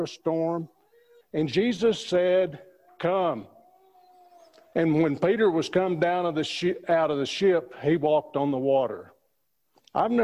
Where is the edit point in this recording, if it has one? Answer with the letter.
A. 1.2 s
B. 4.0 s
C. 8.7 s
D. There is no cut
A